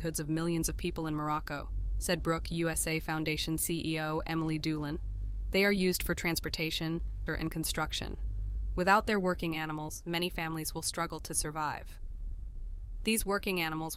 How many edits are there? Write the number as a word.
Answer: one